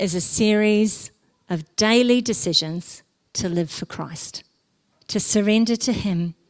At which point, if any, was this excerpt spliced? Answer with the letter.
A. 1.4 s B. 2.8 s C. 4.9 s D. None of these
C